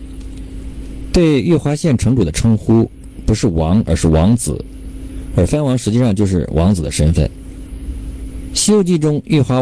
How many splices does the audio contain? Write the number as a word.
zero